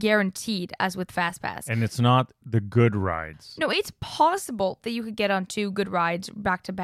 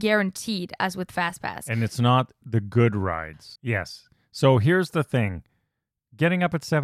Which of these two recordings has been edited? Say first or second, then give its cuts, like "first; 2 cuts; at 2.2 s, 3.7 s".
second; 1 cut; at 3.6 s